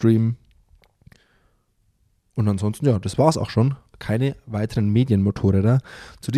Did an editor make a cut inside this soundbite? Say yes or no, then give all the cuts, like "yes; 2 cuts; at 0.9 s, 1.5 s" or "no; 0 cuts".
no; 0 cuts